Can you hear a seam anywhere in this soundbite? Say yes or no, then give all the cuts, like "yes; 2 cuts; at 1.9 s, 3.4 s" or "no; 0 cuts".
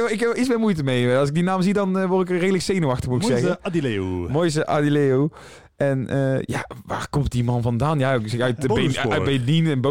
no; 0 cuts